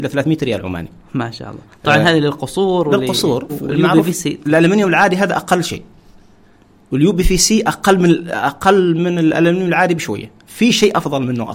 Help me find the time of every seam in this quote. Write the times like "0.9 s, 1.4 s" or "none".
3.5 s